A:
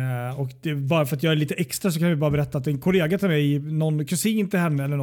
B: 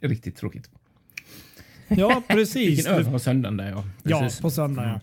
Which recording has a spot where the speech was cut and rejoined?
B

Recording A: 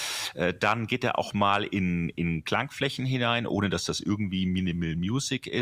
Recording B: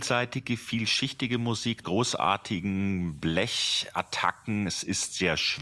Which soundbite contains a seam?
B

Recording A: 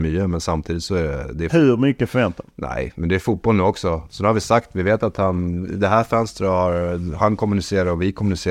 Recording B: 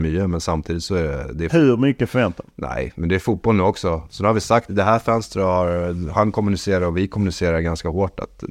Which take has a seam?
B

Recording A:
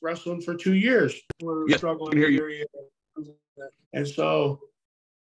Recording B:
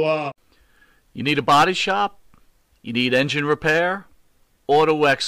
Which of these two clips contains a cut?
A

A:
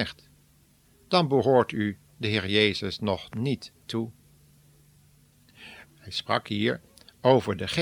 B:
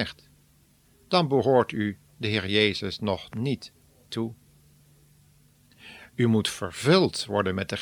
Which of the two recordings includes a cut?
A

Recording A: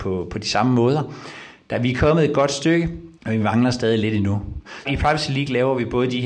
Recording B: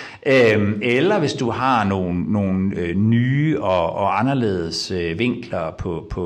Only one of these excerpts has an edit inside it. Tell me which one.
A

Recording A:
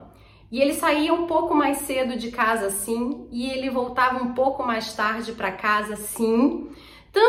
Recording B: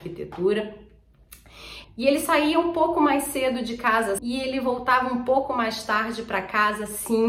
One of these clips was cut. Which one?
B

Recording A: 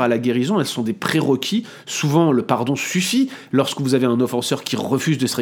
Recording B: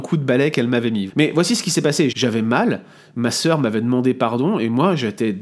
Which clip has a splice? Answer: B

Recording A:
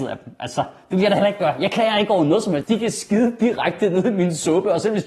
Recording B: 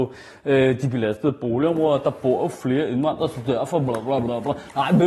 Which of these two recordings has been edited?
A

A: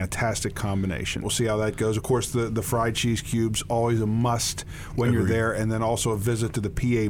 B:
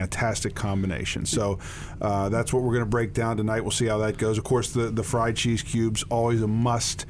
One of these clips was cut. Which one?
A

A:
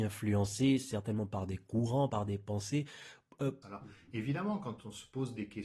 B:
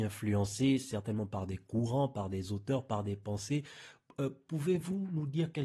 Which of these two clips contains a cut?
A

